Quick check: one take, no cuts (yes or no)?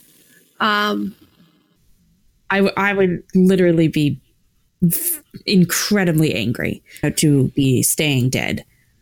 no